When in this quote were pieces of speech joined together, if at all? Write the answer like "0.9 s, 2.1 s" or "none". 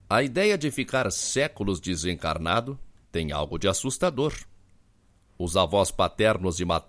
3.0 s, 5.3 s